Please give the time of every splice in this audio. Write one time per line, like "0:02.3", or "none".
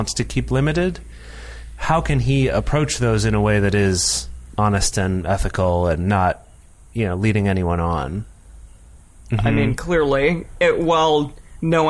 0:09.3